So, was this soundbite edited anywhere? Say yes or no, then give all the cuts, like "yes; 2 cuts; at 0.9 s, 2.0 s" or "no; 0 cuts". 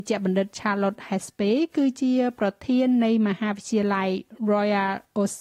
no; 0 cuts